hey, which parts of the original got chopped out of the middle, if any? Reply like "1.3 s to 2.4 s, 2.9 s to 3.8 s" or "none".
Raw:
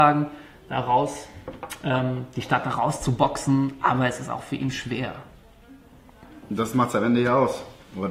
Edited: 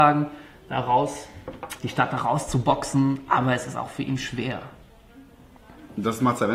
1.8 s to 2.3 s